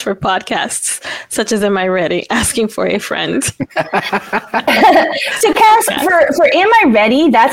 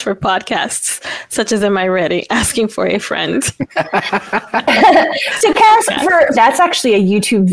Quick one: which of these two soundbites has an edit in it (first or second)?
second